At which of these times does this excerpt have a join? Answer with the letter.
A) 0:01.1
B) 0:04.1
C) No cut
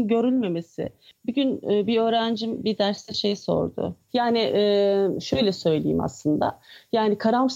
B